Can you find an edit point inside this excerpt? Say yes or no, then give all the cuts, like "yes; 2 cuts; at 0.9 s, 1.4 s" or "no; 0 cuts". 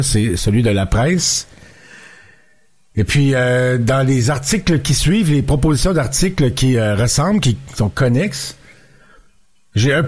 no; 0 cuts